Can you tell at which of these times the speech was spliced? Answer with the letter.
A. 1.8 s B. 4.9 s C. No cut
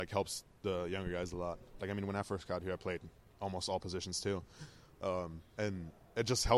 A